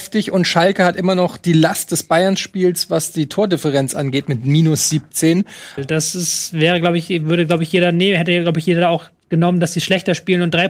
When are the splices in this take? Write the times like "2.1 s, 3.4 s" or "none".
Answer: 5.8 s